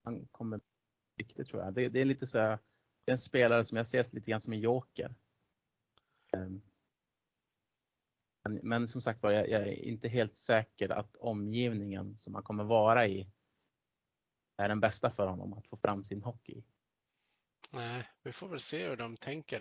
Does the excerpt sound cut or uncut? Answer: uncut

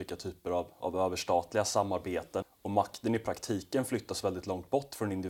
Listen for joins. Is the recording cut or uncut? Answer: cut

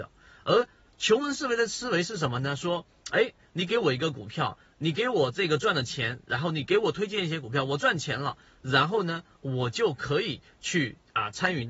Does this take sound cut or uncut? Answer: uncut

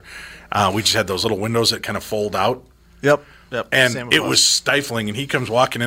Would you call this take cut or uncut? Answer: uncut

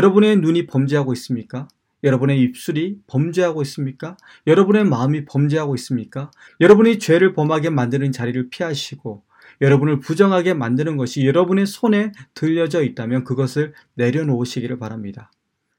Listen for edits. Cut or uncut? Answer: cut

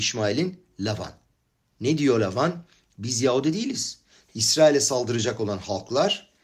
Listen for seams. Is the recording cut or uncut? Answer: cut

